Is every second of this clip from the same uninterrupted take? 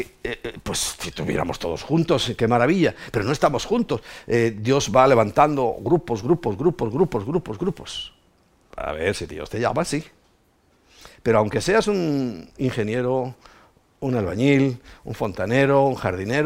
no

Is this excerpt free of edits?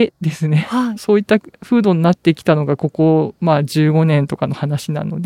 no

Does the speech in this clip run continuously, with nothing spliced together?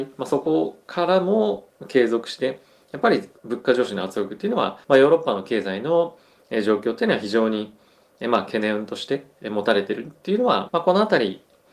no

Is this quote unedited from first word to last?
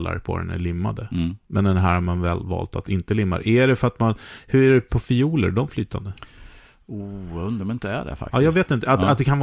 yes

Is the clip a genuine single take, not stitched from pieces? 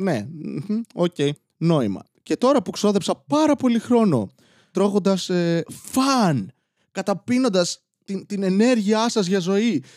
yes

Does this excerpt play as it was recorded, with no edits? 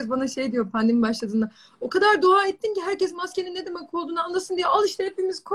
yes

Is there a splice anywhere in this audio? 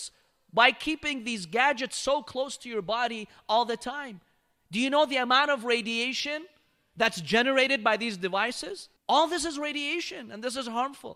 yes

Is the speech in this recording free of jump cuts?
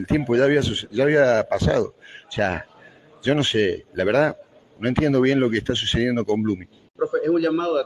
no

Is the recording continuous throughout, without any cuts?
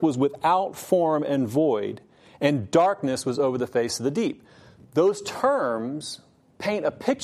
yes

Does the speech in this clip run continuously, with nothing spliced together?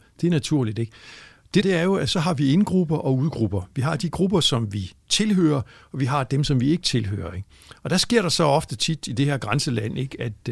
no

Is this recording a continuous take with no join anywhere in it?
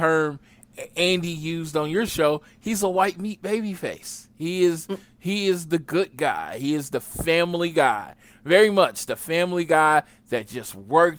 yes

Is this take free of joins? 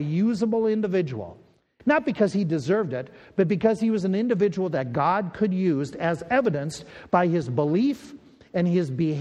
no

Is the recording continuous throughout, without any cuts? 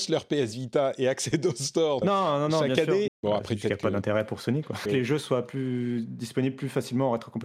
no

